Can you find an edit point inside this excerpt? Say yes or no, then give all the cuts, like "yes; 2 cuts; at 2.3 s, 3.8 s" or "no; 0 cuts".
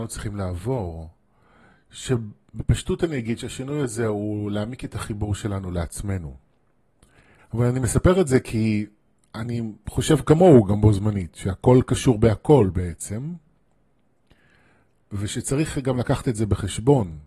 yes; 1 cut; at 7.4 s